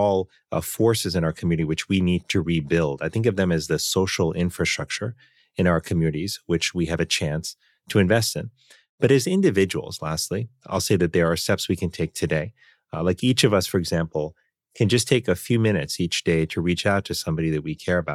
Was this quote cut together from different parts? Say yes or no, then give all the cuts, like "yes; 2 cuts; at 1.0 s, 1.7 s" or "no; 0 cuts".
yes; 1 cut; at 2.2 s